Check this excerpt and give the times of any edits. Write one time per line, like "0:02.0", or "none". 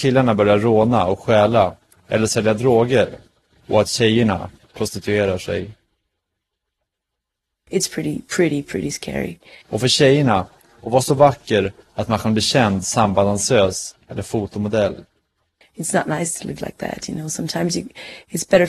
0:07.7
0:09.6
0:15.6